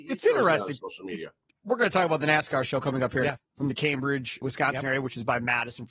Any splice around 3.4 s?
yes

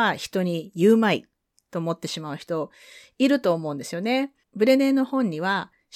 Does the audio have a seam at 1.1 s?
no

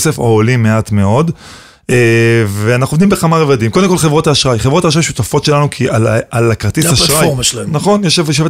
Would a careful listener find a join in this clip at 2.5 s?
no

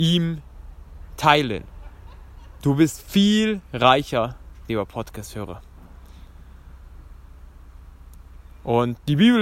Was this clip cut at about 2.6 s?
yes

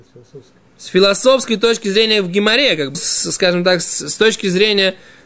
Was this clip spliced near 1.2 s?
no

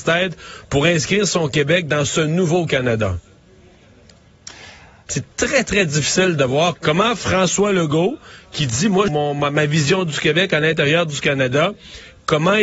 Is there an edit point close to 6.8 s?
yes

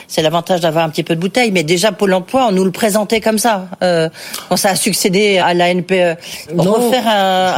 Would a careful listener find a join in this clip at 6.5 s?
yes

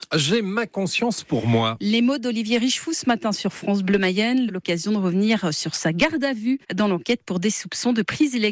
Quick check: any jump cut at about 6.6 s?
yes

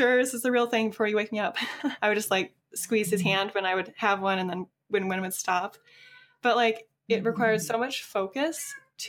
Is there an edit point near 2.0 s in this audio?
yes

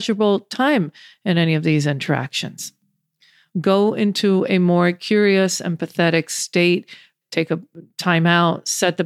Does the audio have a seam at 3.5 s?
yes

